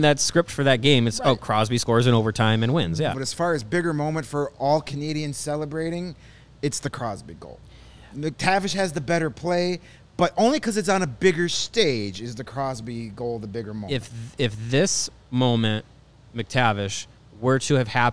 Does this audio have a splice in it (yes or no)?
yes